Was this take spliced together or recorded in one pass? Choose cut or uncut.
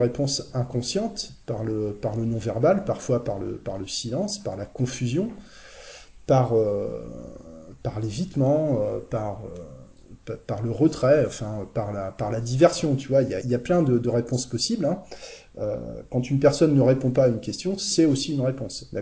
cut